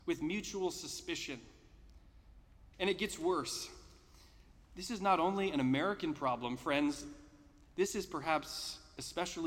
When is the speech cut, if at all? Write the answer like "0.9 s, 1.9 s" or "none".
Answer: 2.7 s